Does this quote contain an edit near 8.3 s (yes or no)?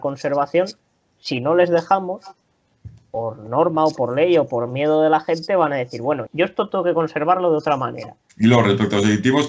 yes